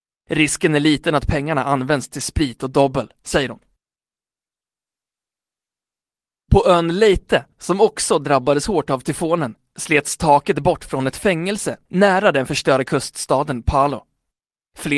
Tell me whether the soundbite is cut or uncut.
uncut